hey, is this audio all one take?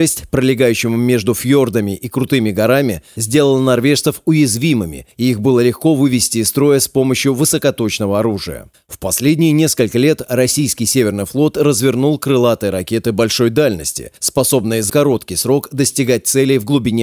no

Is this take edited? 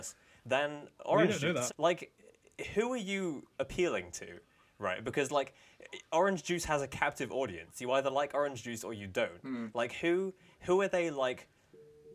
yes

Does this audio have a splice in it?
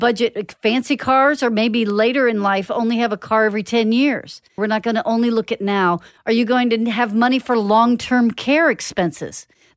yes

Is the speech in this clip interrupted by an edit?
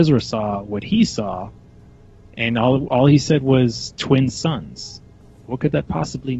no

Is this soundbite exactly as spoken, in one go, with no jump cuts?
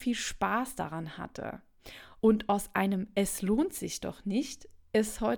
yes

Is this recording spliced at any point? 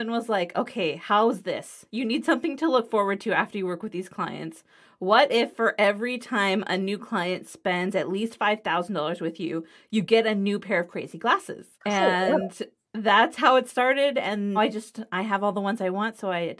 yes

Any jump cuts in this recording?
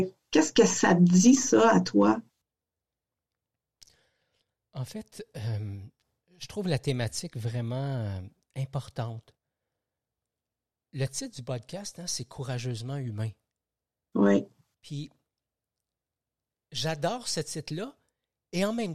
no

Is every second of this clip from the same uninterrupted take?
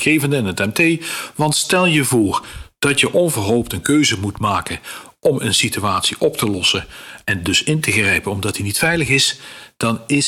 yes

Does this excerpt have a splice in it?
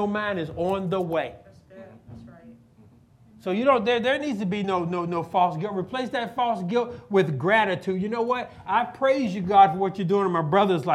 no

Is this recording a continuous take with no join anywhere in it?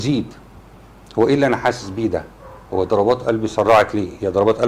yes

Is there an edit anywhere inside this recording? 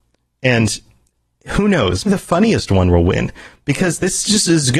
yes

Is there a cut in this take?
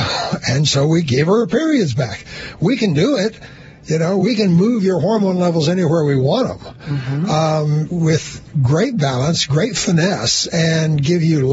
yes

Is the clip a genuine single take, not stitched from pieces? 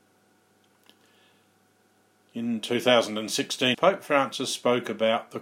no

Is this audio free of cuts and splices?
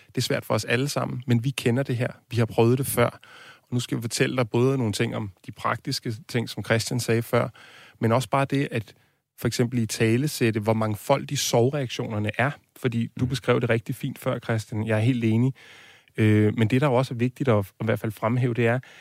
yes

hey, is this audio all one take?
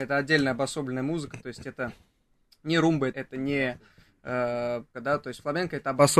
no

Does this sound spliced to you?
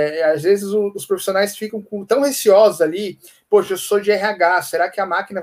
no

